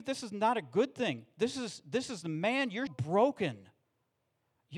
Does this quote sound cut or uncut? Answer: cut